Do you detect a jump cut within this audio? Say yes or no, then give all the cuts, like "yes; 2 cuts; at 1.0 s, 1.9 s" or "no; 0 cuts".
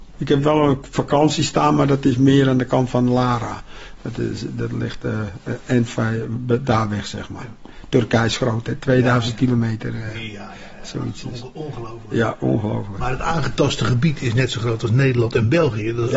no; 0 cuts